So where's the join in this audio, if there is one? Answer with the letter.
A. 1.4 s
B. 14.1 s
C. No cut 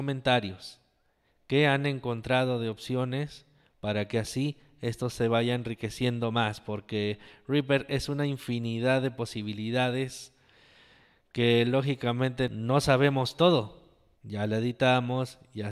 B